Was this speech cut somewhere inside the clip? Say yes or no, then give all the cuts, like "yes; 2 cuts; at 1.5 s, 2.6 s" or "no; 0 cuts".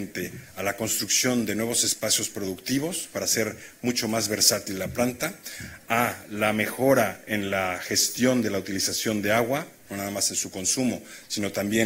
no; 0 cuts